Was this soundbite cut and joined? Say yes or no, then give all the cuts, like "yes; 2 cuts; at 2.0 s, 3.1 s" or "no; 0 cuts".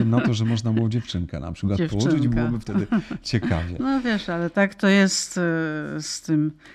no; 0 cuts